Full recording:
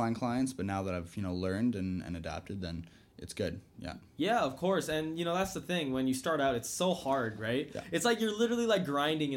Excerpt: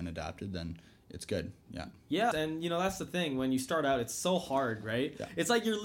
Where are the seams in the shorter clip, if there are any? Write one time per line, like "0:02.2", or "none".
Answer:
0:02.3